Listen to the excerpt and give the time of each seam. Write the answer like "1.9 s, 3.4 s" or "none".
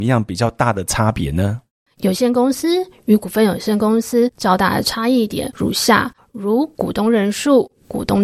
1.9 s